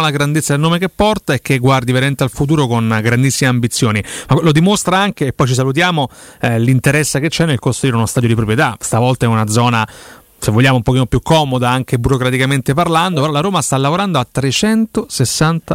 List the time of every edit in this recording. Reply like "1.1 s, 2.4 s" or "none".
none